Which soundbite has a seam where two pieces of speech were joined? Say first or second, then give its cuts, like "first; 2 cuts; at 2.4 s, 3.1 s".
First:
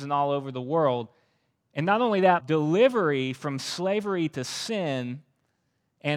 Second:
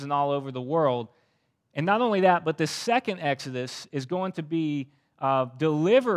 first; 1 cut; at 2.4 s